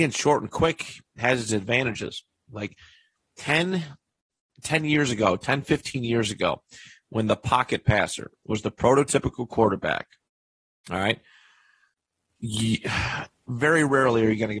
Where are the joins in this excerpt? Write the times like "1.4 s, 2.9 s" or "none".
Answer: 2.5 s